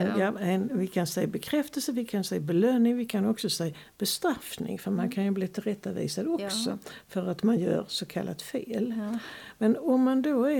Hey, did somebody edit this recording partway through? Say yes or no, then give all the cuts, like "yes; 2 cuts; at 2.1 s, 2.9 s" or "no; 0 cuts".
no; 0 cuts